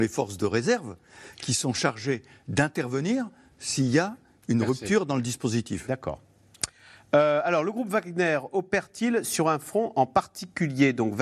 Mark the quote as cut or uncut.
uncut